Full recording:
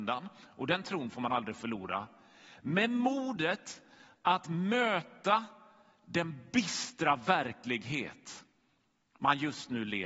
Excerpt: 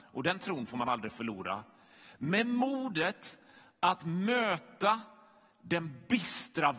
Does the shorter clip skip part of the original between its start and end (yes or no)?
no